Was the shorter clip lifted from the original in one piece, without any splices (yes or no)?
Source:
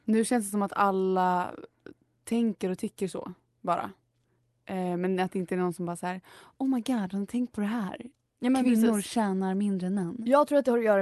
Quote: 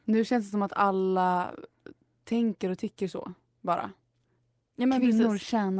no